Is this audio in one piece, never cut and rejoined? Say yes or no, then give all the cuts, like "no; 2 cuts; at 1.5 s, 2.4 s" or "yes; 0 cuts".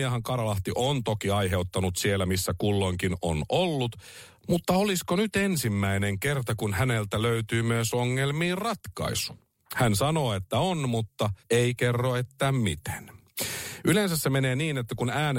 no; 1 cut; at 11.4 s